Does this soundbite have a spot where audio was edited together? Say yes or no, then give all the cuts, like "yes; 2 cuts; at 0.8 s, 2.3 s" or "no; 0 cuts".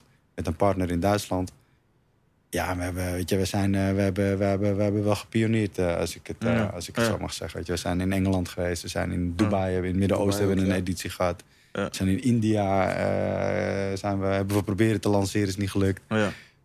no; 0 cuts